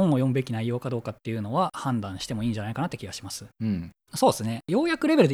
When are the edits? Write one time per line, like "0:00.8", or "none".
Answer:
0:04.0